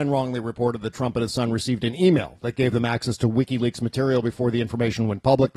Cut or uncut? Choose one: uncut